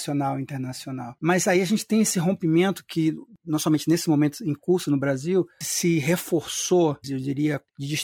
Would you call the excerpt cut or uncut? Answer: cut